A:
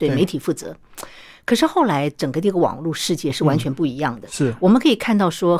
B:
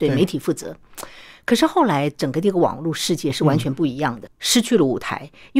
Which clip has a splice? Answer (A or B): B